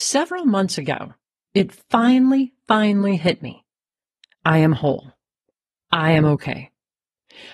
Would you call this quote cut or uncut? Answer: cut